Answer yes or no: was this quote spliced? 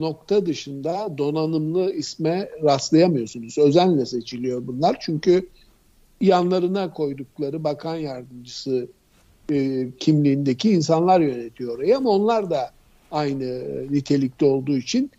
no